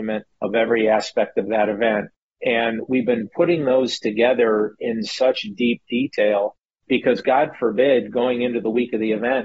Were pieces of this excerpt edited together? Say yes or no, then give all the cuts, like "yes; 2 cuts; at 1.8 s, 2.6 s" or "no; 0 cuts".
no; 0 cuts